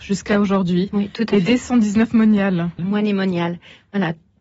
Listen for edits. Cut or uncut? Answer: cut